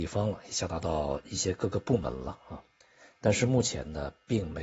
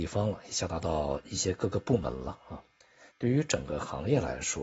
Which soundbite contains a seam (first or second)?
second